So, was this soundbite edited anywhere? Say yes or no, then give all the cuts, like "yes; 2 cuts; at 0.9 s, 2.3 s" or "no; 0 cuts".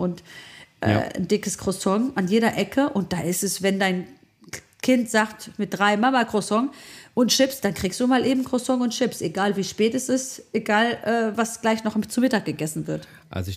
no; 0 cuts